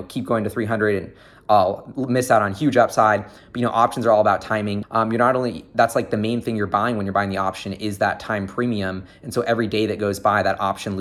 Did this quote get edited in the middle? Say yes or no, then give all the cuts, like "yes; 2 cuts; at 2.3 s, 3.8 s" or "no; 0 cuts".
yes; 1 cut; at 4.8 s